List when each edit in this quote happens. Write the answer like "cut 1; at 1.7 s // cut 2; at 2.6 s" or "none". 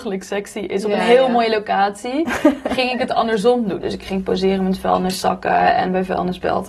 cut 1; at 3.8 s